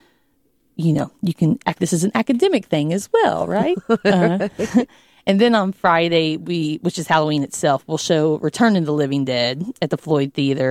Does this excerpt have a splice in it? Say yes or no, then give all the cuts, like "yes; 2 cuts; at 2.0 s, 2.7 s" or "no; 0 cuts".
yes; 1 cut; at 1.8 s